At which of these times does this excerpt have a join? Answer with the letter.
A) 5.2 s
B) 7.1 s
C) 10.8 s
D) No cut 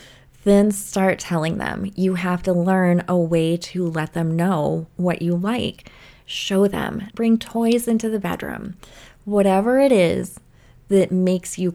B